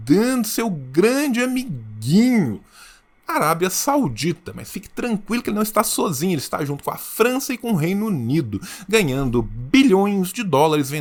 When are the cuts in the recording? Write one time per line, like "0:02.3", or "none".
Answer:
none